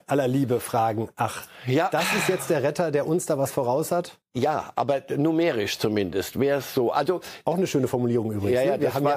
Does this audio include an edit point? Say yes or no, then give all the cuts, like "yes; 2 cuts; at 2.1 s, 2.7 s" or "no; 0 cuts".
no; 0 cuts